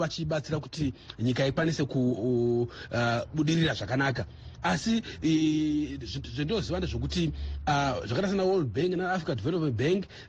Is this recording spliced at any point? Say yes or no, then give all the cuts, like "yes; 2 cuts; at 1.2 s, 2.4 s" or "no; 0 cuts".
no; 0 cuts